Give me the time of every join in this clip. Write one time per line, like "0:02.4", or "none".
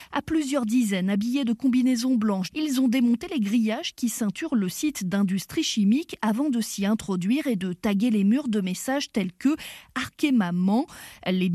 0:02.5